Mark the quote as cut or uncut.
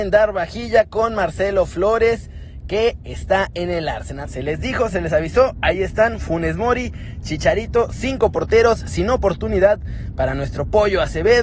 cut